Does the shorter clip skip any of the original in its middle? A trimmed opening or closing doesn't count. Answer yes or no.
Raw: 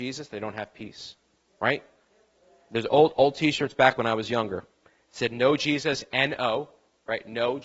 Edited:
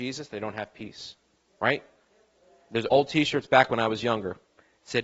yes